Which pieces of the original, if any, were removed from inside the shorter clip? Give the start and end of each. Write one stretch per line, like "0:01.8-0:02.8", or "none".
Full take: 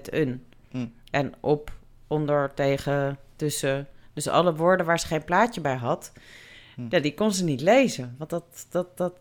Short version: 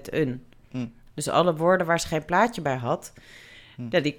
0:01.1-0:04.1

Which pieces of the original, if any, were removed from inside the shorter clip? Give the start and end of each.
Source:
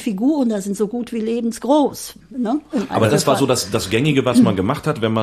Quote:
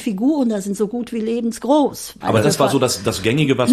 0:02.2-0:02.9

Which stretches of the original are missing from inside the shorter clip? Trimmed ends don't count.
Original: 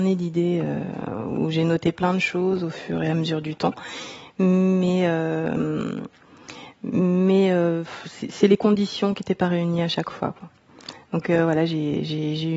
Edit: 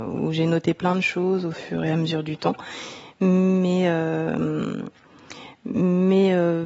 none

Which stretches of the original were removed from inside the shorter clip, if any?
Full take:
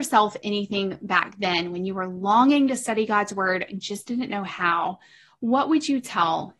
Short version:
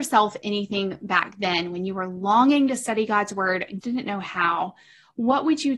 0:03.8-0:04.0

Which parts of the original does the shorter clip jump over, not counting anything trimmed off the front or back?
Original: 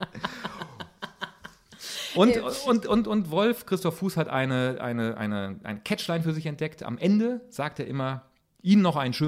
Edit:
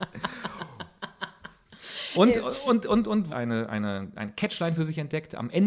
0:03.3-0:04.8

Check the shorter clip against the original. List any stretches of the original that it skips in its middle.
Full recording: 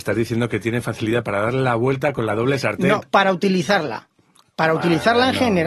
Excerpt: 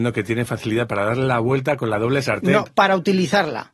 none

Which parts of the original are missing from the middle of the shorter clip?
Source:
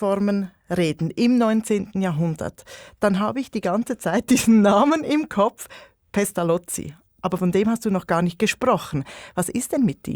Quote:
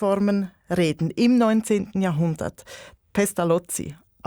0:03.0-0:06.0

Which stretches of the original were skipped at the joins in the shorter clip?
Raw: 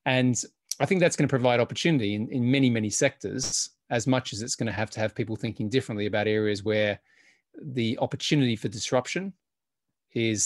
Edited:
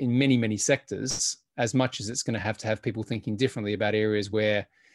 none

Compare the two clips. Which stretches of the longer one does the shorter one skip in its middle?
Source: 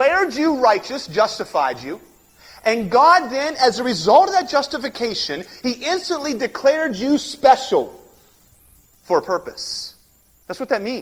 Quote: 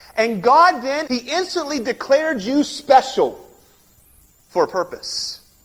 0:03.5-0:05.6

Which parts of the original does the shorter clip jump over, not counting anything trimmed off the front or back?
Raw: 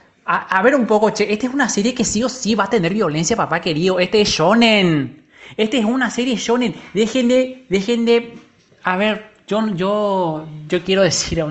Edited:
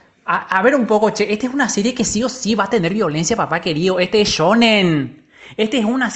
none

